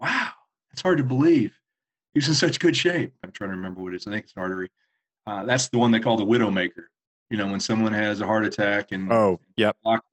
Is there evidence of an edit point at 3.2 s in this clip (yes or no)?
yes